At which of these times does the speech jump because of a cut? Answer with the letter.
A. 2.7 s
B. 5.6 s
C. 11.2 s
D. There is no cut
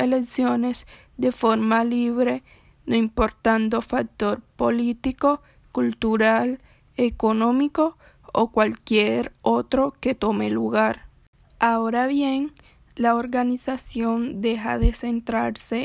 D